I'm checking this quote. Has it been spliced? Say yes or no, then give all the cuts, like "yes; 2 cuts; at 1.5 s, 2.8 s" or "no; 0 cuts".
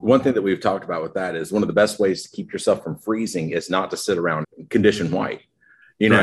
yes; 1 cut; at 4.4 s